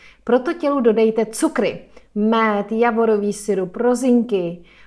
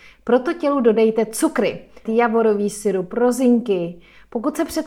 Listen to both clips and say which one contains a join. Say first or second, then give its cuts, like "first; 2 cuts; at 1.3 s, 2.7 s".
second; 1 cut; at 2.0 s